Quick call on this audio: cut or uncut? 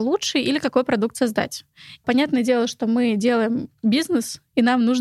cut